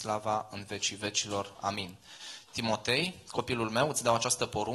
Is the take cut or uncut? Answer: uncut